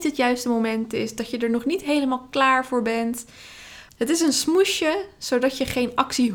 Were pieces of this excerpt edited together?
yes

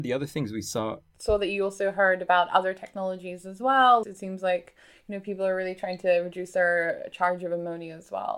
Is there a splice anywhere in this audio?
yes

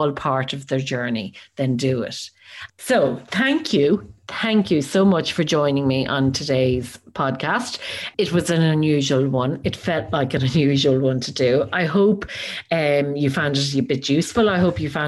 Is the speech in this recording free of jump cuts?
no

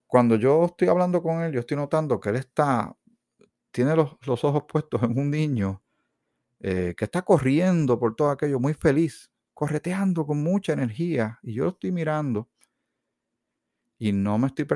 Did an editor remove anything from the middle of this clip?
no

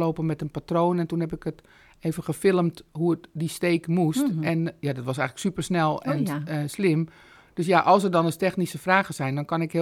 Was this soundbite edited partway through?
no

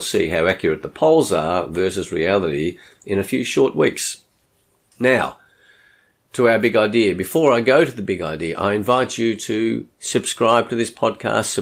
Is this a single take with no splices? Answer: yes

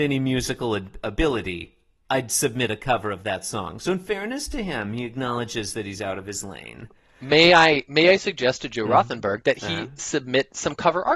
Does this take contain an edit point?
no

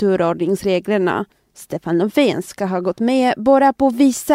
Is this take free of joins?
yes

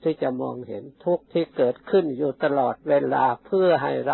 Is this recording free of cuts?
no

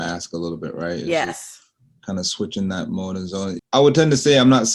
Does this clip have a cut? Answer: yes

